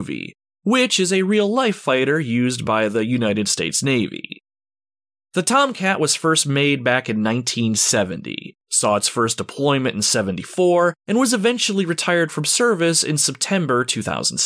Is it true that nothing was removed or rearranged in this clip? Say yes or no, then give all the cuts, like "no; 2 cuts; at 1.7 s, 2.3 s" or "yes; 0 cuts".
yes; 0 cuts